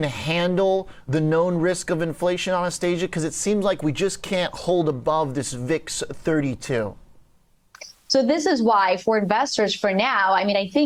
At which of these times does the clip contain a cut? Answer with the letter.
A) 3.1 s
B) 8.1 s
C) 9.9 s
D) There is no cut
B